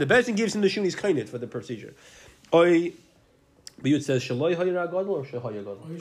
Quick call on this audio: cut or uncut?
uncut